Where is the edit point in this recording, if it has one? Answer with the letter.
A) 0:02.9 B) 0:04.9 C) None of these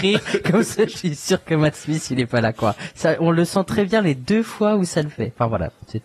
A